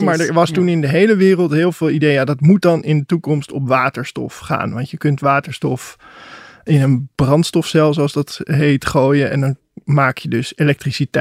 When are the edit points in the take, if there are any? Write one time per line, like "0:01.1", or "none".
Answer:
none